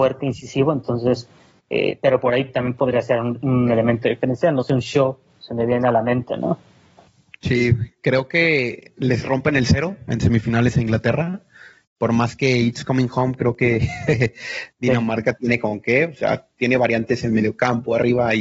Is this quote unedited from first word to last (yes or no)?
yes